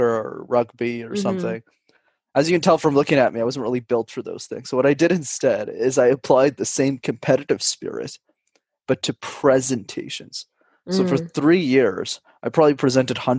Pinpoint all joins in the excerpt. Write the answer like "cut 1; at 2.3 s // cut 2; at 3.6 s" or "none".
none